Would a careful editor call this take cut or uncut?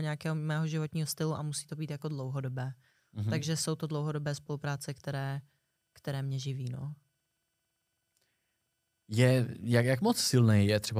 uncut